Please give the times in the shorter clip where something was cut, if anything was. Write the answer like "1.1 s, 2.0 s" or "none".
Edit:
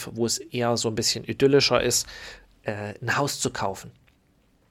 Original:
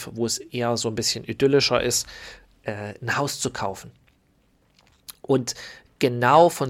none